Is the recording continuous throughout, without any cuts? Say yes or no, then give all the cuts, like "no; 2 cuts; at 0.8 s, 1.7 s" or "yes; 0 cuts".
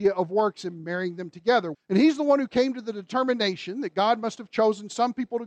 no; 1 cut; at 1.7 s